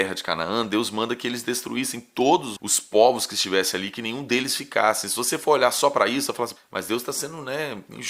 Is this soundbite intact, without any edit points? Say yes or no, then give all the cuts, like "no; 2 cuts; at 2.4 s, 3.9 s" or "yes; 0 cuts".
no; 2 cuts; at 2.6 s, 6.6 s